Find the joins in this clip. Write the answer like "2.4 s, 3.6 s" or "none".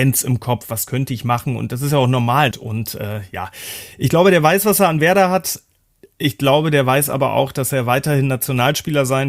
2.5 s